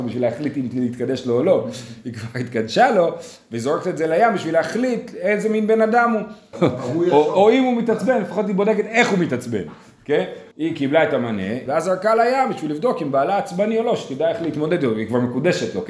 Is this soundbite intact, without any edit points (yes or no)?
no